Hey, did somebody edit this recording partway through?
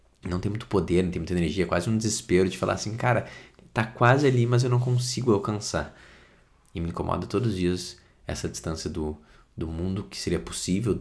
no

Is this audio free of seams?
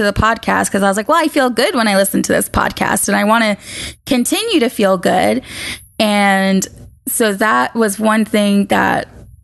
yes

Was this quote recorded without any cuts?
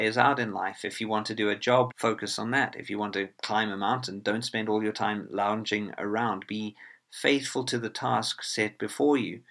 no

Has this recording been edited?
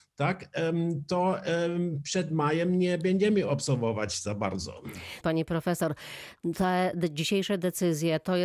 yes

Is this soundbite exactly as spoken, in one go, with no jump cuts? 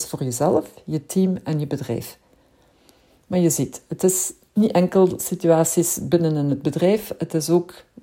yes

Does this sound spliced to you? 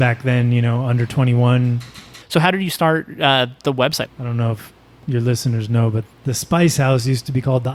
yes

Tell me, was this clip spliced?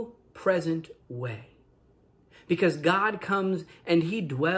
no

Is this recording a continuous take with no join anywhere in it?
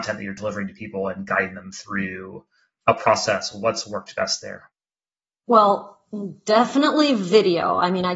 yes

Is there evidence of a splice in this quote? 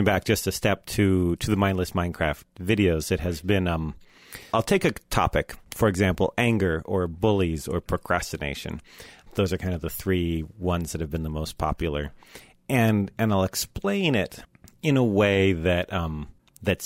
no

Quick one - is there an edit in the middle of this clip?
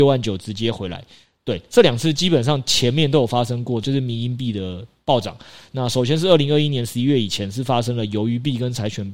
no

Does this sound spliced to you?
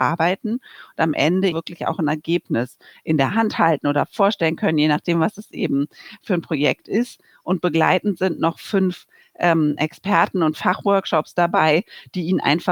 yes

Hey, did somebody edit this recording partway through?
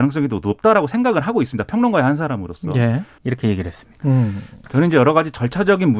yes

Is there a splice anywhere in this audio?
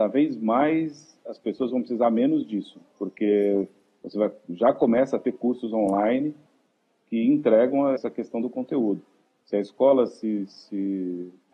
yes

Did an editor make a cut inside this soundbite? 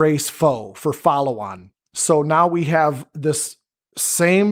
no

